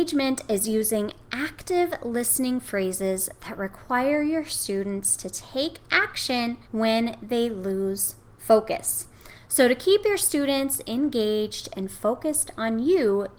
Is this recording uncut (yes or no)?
no